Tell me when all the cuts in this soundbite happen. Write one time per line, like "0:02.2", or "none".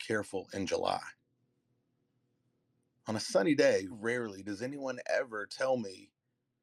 0:03.9